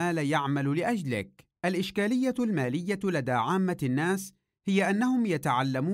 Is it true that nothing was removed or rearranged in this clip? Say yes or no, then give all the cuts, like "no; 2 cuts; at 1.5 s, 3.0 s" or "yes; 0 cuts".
no; 1 cut; at 1.6 s